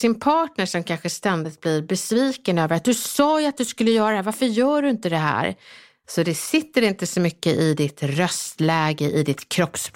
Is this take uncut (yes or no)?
no